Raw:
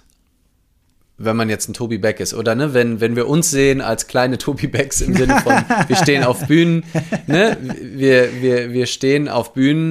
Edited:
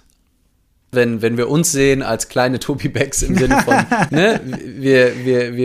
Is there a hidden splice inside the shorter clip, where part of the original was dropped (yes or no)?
yes